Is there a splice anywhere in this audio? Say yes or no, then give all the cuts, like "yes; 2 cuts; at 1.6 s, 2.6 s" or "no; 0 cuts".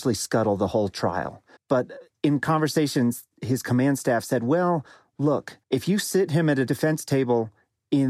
yes; 2 cuts; at 1.6 s, 5.6 s